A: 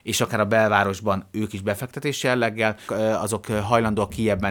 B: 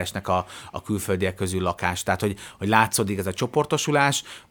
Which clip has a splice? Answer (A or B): A